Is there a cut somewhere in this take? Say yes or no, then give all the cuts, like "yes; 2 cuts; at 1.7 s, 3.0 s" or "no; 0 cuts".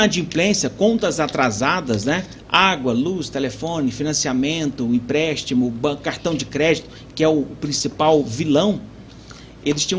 no; 0 cuts